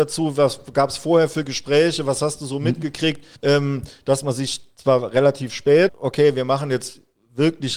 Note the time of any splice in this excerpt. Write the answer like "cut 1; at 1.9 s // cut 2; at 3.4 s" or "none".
cut 1; at 3.4 s // cut 2; at 5.9 s